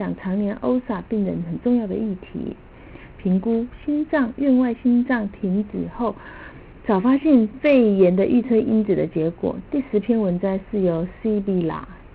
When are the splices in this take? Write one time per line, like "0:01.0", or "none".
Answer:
0:03.1
0:06.8
0:09.6